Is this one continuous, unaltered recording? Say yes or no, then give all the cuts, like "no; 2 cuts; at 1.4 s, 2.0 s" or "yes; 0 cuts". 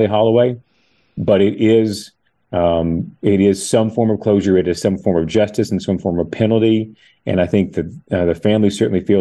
yes; 0 cuts